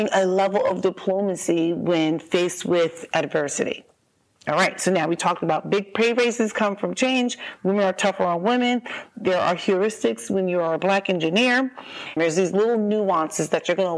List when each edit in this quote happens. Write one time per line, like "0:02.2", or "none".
0:12.2